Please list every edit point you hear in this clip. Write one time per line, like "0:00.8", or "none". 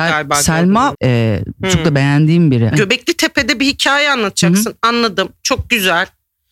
0:00.9
0:02.7